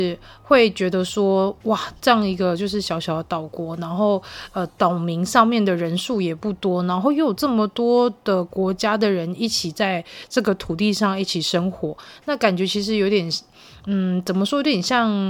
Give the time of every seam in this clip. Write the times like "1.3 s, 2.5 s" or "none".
none